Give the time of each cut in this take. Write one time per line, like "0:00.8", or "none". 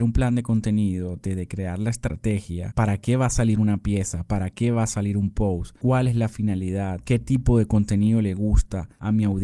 0:02.7